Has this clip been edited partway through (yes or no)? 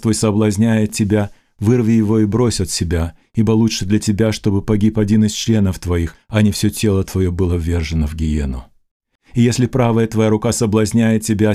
no